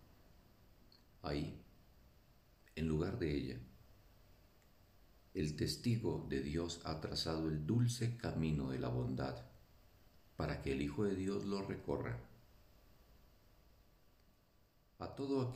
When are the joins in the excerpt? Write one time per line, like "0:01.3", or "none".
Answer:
none